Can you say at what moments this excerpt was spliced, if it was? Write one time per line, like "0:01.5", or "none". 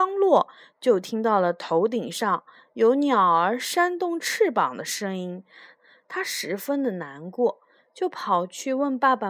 0:05.8